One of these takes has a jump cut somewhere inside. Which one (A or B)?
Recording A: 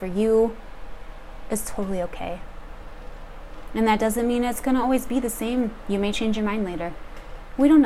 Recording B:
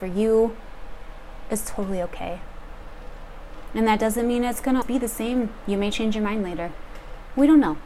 B